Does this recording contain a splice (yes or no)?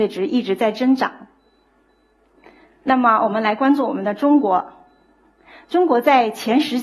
no